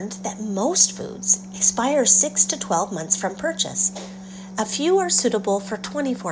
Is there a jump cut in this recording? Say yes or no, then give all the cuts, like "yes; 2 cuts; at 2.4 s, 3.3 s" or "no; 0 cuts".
yes; 1 cut; at 1.5 s